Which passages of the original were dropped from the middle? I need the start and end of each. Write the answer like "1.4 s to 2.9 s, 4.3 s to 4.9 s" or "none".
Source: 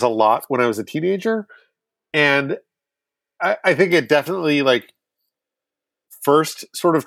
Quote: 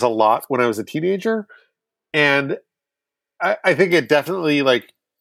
none